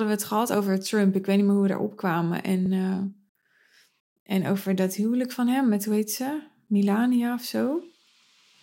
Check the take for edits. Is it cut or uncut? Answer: uncut